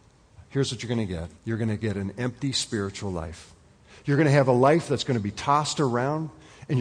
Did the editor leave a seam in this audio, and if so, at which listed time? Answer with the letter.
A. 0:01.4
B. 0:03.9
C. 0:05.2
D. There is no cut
A